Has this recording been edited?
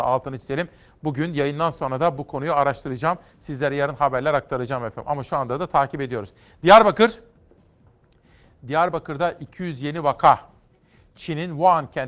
no; 0 cuts

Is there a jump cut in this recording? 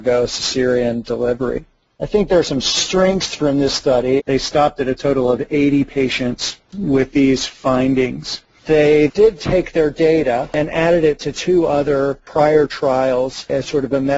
yes; 2 cuts; at 4.2 s, 9.1 s

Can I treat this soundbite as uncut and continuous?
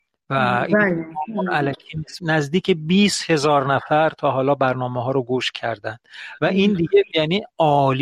no; 1 cut; at 2.2 s

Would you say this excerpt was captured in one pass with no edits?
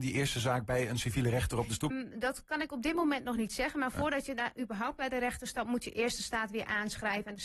no; 1 cut; at 1.9 s

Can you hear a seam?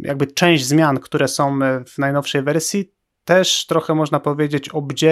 yes; 1 cut; at 1.9 s

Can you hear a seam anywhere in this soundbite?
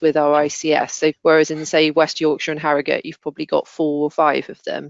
yes; 1 cut; at 1.1 s

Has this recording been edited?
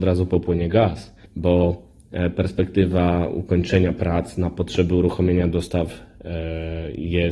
yes; 1 cut; at 1.3 s

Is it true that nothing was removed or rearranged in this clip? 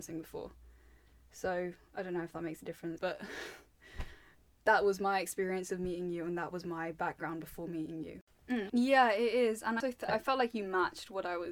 no; 2 cuts; at 8.7 s, 9.8 s

